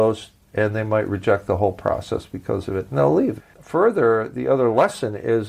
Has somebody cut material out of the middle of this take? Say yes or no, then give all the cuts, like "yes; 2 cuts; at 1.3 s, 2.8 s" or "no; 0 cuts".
yes; 1 cut; at 3.4 s